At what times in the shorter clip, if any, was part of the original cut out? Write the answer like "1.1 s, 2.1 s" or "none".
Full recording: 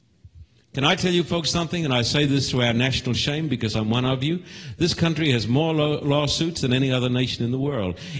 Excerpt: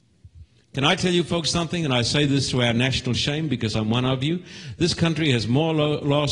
none

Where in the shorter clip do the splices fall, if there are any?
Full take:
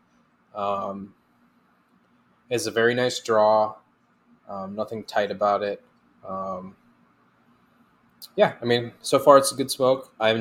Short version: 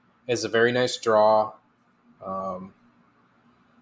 2.2 s

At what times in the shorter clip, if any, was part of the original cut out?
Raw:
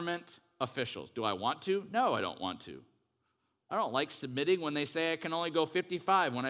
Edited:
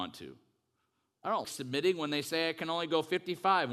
1.4 s

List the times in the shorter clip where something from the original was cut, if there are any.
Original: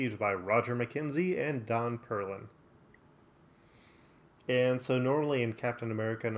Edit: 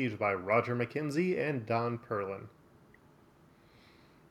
none

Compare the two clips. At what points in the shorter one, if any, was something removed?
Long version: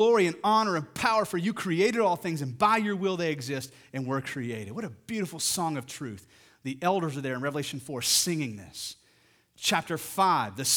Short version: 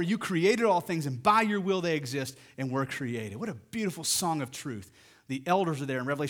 none

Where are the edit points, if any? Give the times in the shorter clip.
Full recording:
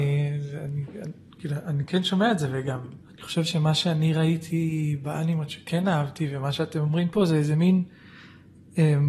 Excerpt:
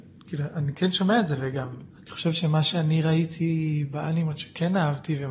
none

